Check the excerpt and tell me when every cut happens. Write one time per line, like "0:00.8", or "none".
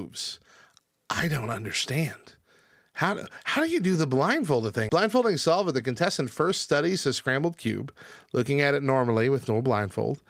0:04.9